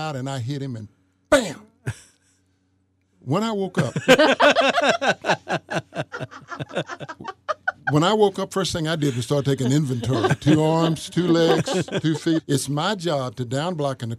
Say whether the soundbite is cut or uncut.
cut